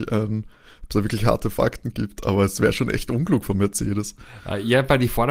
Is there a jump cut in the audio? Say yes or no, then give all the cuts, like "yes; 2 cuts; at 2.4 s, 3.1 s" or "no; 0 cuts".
no; 0 cuts